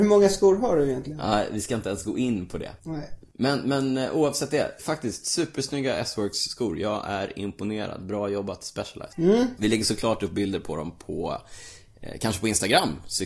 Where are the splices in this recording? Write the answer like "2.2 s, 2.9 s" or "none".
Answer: 4.8 s